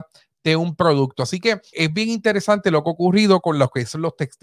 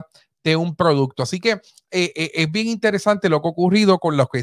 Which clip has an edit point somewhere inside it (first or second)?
first